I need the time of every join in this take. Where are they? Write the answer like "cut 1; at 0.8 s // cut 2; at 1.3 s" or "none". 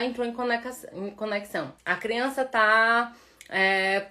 cut 1; at 1.8 s